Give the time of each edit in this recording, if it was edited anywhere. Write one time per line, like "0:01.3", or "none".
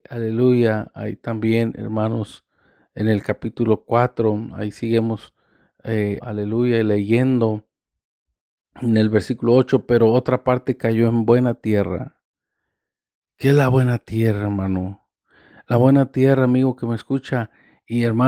0:06.2